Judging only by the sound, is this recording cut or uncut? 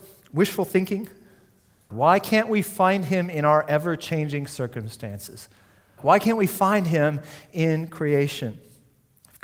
cut